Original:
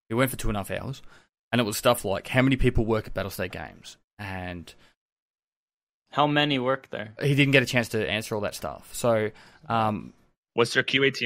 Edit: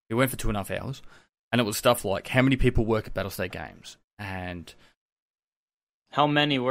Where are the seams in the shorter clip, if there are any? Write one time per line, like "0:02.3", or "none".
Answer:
none